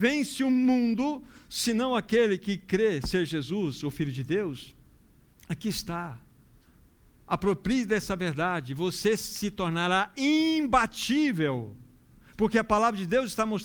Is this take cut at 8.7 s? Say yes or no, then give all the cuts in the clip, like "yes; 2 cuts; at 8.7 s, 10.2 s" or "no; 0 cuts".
no; 0 cuts